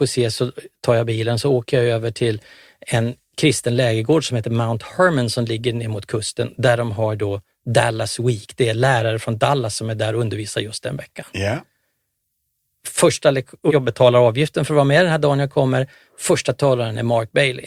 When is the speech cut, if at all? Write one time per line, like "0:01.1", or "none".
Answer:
0:13.7